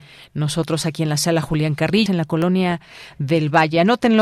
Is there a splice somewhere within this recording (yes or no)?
yes